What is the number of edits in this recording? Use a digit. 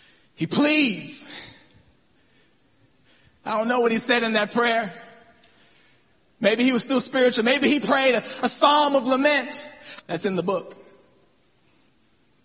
1